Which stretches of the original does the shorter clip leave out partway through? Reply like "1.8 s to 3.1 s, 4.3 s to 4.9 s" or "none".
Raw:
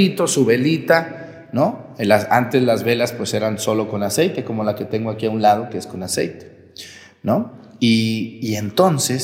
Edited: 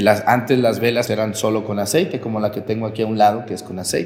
3.1 s to 3.3 s